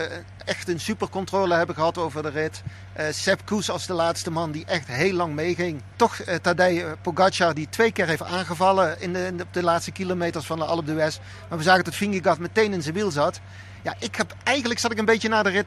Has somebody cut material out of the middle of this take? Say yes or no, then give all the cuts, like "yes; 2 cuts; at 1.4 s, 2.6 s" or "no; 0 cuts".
no; 0 cuts